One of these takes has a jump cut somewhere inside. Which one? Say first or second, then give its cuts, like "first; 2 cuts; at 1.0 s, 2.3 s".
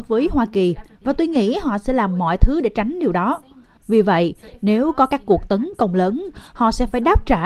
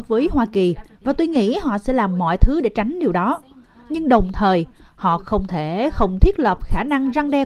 first; 1 cut; at 3.8 s